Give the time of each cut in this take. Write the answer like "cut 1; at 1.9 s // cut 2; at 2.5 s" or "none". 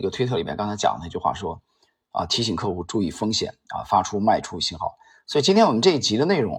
none